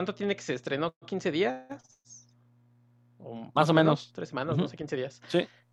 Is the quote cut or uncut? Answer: uncut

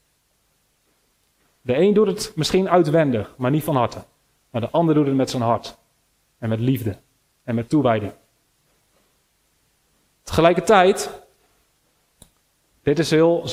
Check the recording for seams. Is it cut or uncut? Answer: uncut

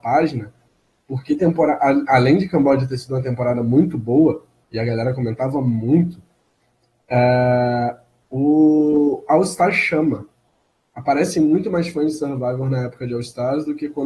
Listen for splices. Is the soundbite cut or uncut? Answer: uncut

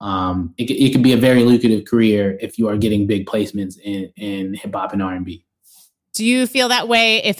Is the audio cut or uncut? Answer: uncut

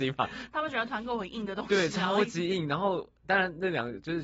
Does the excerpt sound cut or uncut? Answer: uncut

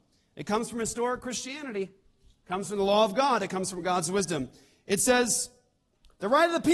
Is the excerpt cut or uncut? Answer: uncut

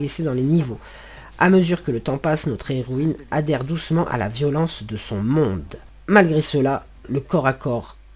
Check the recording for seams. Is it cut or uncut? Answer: uncut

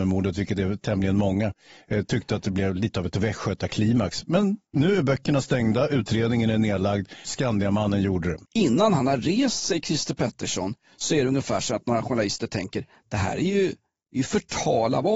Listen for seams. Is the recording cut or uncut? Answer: cut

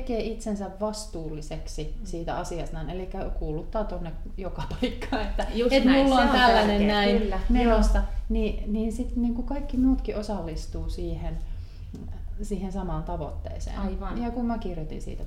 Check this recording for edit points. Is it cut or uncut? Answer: uncut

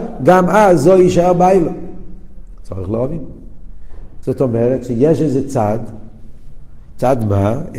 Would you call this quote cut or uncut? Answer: cut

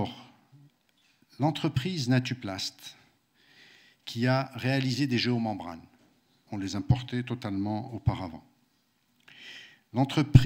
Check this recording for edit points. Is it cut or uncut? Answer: cut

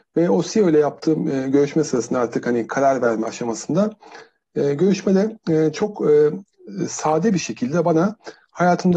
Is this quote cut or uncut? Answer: uncut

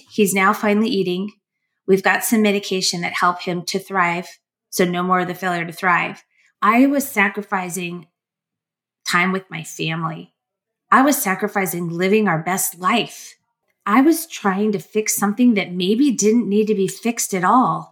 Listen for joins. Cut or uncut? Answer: cut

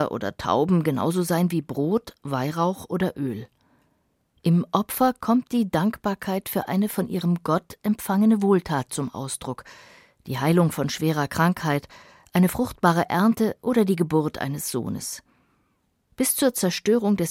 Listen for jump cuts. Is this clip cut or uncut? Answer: uncut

